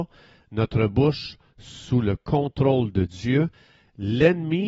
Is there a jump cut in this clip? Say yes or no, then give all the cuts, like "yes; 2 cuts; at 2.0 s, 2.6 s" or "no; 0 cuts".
no; 0 cuts